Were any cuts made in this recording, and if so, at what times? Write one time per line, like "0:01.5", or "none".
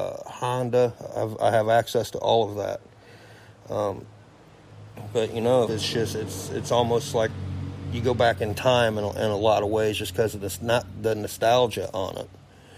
0:05.7